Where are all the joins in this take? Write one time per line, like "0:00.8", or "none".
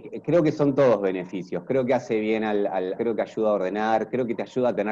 0:03.0